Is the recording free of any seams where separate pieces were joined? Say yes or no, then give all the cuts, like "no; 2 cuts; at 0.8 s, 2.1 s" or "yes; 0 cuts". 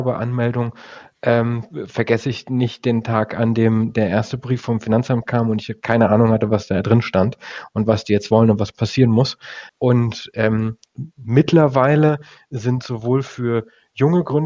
no; 1 cut; at 9.7 s